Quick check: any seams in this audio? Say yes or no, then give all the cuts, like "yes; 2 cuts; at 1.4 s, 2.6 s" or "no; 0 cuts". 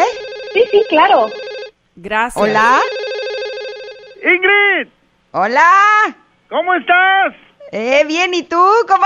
no; 0 cuts